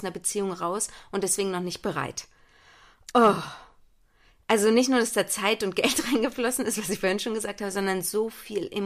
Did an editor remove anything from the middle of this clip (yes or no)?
no